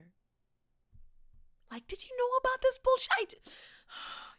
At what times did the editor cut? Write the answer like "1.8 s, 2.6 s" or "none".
none